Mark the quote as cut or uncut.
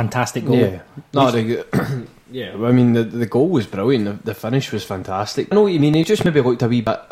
cut